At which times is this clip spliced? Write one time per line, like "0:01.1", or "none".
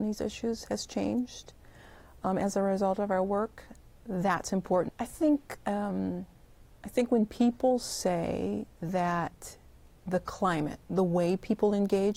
0:04.9
0:06.7